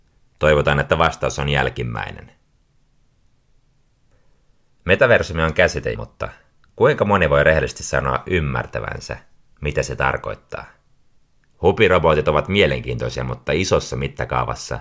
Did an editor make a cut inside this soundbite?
yes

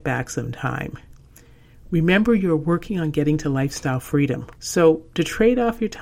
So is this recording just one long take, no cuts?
no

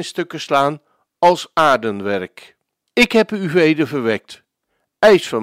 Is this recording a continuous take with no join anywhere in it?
no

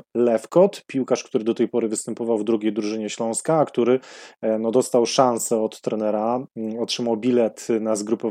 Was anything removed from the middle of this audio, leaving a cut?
no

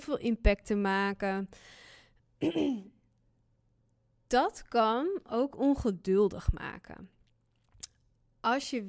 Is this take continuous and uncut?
yes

